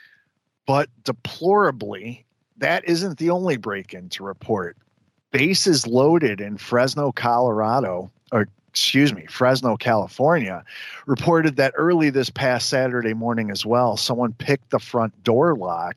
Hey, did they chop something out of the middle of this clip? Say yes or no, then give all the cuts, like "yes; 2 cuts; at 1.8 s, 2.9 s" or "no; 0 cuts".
no; 0 cuts